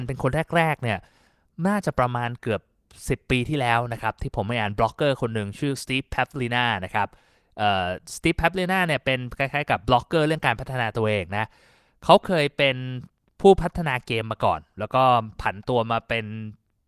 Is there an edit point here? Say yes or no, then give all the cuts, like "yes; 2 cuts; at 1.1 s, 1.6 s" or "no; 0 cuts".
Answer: no; 0 cuts